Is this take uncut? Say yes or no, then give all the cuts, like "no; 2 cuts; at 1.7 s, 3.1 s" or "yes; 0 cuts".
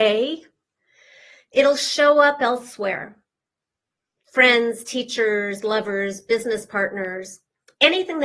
yes; 0 cuts